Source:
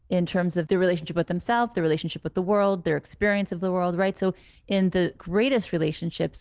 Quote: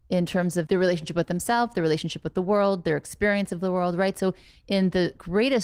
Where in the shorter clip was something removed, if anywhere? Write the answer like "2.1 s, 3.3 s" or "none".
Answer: none

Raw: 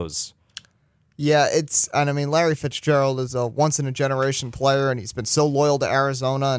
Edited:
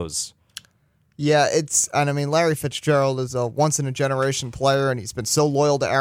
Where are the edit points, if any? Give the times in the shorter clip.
none

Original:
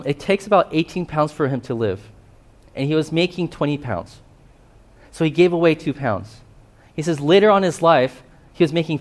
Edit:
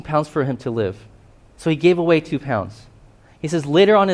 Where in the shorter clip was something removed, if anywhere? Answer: 1.5 s

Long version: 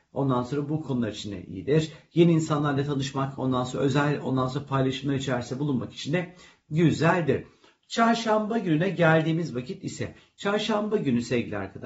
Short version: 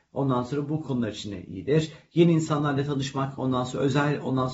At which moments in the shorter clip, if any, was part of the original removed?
none

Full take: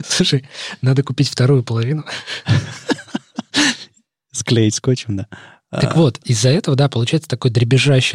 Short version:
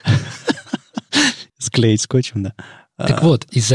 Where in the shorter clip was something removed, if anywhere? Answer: 1.5 s

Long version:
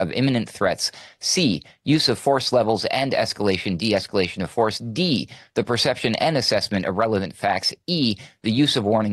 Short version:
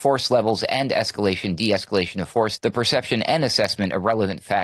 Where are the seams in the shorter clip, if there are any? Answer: 2.6 s

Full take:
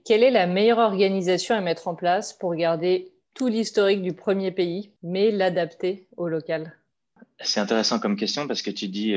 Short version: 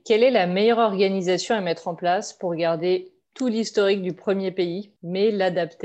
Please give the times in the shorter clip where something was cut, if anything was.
none

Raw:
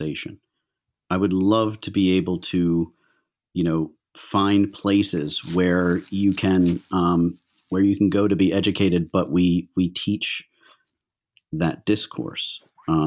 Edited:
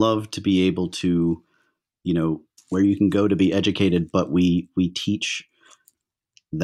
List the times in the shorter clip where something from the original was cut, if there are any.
2.6 s

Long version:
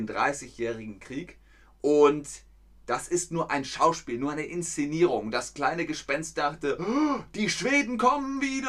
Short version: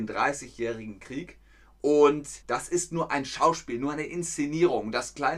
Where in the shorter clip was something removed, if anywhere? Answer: 2.4 s

